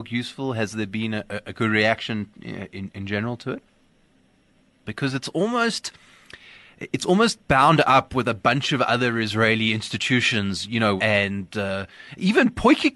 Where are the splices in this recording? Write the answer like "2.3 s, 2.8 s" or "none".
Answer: 4.8 s, 11.0 s